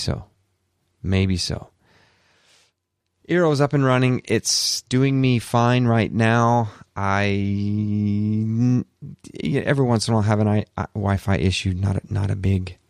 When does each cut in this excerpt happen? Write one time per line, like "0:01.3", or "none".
none